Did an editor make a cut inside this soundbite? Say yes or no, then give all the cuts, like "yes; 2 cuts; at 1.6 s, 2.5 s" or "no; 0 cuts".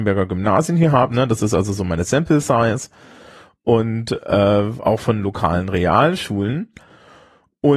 no; 0 cuts